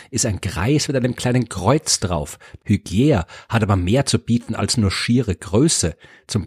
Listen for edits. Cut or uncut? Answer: cut